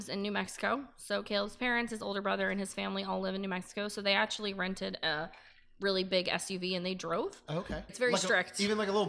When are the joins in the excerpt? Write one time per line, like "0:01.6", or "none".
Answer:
0:07.9

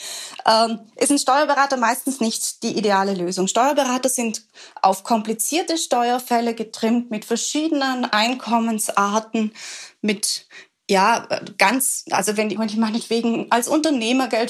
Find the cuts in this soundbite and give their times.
0:12.6

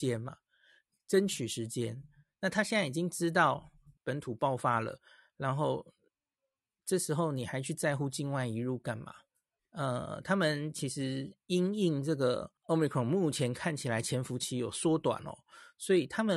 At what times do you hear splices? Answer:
0:04.0
0:09.6
0:12.6

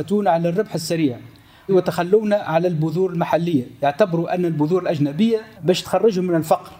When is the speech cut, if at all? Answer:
none

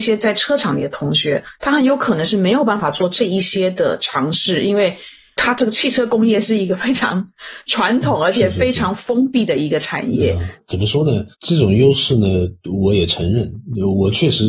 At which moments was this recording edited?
0:11.3

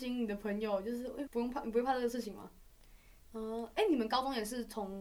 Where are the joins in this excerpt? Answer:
0:01.3
0:03.2

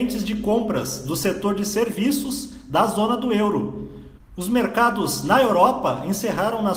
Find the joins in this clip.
0:04.2

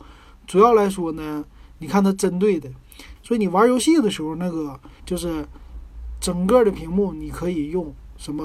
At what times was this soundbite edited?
0:03.2
0:05.0

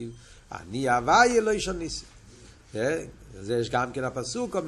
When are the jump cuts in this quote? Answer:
none

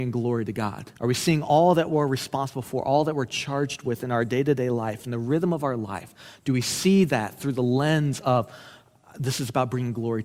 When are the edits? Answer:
0:01.0

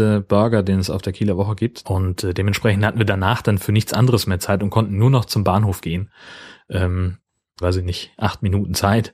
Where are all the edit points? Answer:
0:01.8
0:07.6

